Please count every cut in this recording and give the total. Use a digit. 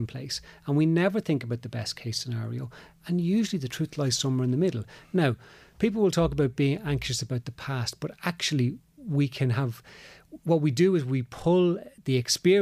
0